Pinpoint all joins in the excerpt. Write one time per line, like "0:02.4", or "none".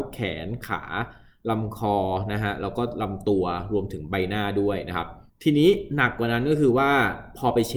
0:05.3